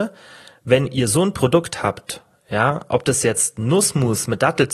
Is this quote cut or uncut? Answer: uncut